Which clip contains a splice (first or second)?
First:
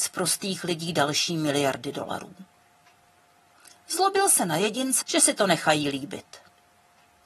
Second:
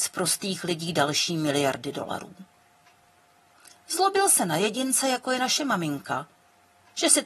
first